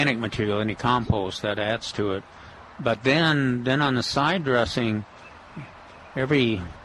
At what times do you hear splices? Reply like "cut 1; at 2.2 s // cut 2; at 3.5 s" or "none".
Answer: none